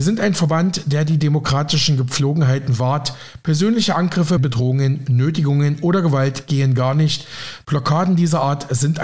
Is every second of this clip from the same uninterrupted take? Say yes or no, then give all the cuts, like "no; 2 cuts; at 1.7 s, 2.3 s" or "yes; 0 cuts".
no; 2 cuts; at 4.4 s, 7.6 s